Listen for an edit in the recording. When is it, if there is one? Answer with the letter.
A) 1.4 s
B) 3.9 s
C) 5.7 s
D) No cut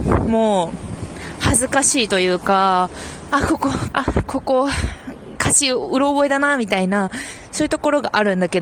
B